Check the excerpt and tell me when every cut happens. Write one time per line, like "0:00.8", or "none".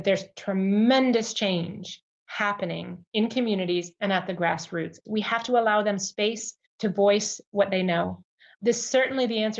0:03.1
0:05.1
0:06.7

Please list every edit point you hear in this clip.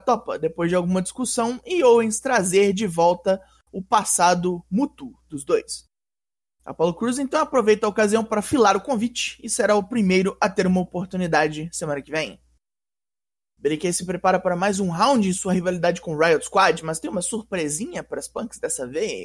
0:06.6

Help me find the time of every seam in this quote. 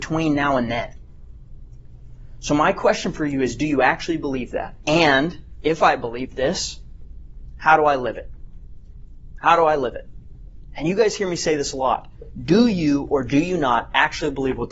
0:04.8

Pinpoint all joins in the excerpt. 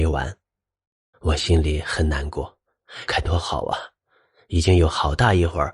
0:01.1
0:03.1

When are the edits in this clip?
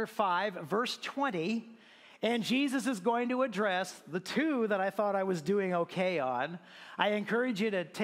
none

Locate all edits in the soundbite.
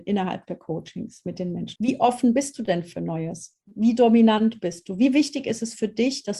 0:01.8

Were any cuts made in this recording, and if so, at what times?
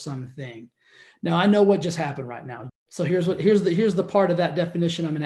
0:02.7

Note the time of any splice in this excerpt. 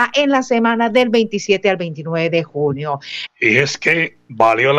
0:03.3

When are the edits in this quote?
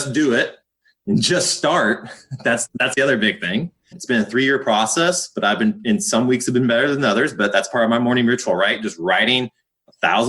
0:03.9

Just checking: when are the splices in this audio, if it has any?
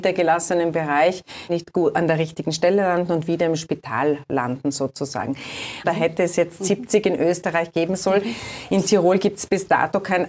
0:01.5
0:05.8

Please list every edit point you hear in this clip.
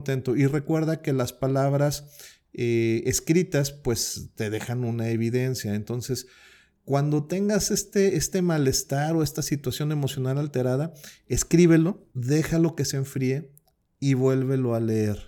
0:12.1

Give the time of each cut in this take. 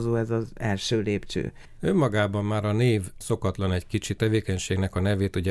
0:01.8
0:04.2

